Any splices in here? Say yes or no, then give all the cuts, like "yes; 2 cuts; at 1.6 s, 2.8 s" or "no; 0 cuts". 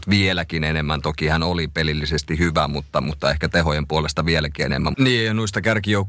yes; 1 cut; at 4.9 s